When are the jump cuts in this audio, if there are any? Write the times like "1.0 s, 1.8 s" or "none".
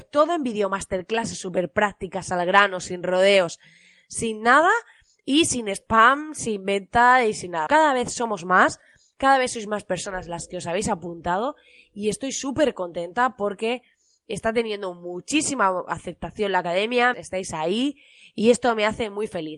7.7 s, 17.1 s